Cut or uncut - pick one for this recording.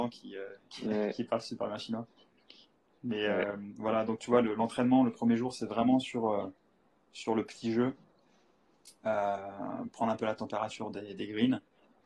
cut